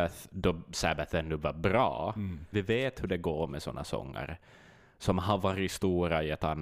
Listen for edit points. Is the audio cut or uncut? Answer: cut